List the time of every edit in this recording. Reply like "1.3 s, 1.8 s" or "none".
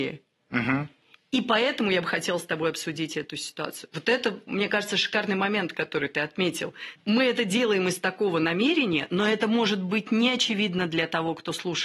none